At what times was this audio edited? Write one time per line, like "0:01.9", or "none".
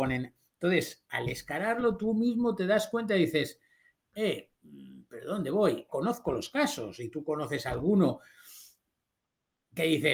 0:05.9